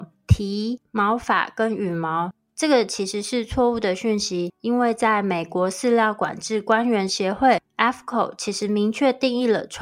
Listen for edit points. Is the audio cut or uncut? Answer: uncut